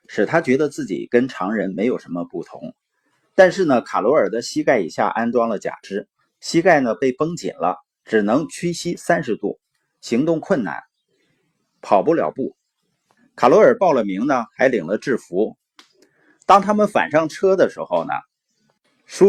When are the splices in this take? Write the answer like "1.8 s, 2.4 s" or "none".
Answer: 3.2 s, 13.2 s